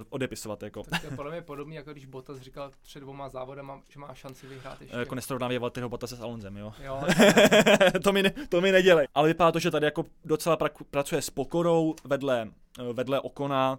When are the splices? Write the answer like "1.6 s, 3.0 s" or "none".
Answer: 9.0 s